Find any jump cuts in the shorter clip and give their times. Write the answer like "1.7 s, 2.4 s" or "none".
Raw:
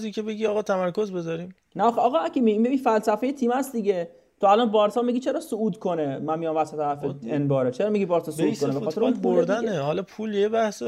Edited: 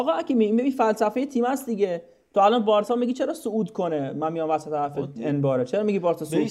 none